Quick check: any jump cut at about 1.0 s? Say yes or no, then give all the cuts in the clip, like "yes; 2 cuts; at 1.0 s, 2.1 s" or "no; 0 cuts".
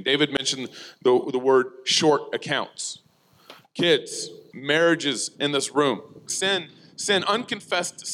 no; 2 cuts; at 4.5 s, 6.3 s